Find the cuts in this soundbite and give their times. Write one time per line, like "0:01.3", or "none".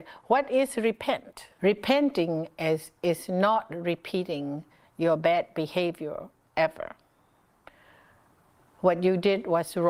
0:01.6